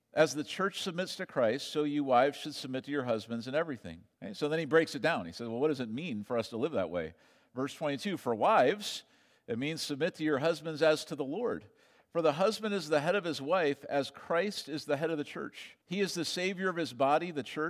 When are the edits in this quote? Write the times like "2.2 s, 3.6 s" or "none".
4.2 s, 15.8 s

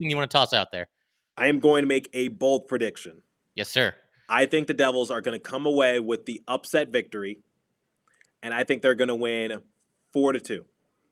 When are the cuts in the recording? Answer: none

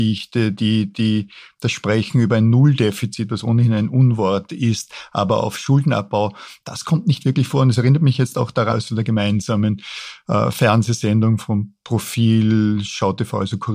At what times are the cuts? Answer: 8.7 s

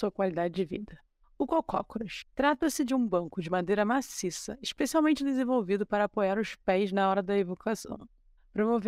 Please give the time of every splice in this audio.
1.2 s

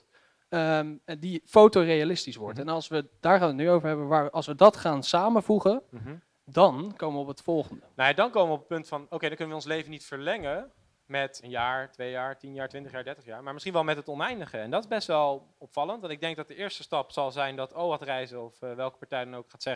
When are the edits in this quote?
11.4 s

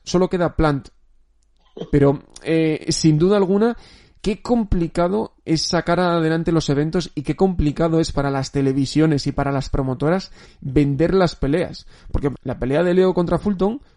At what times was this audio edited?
1.9 s, 12.3 s

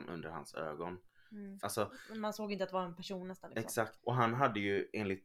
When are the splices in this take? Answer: 1.6 s, 4.0 s

